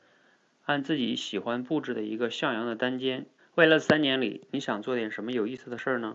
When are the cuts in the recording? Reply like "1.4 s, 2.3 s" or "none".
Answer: 3.4 s